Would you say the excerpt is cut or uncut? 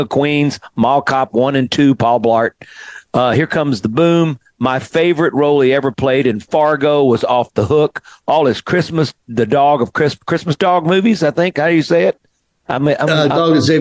uncut